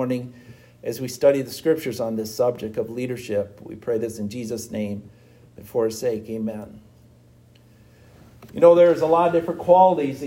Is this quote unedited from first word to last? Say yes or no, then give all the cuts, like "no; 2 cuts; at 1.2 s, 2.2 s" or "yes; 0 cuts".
yes; 0 cuts